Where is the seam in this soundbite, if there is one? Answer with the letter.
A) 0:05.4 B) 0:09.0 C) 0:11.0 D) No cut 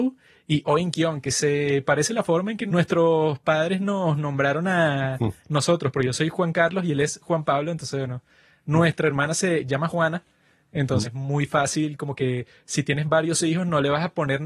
C